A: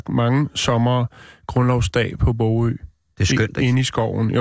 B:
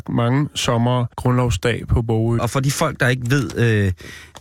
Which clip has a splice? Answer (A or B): B